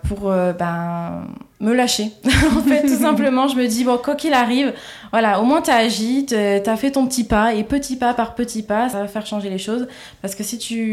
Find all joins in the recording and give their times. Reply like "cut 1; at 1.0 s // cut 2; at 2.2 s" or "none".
cut 1; at 1.5 s